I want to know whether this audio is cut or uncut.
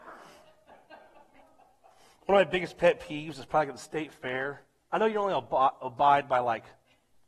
uncut